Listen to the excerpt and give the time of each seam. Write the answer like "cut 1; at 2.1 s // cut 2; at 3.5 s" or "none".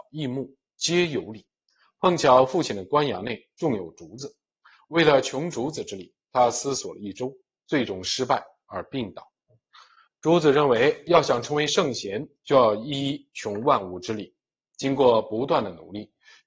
none